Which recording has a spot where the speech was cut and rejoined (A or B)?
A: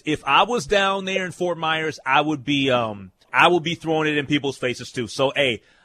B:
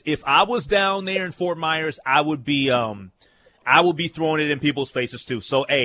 A